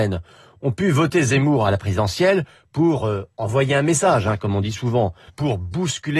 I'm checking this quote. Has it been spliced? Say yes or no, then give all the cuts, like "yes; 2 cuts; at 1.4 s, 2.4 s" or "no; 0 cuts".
yes; 1 cut; at 5.3 s